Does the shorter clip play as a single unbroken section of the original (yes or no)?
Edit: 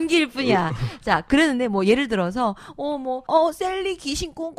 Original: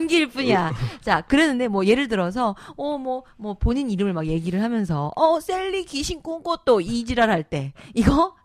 no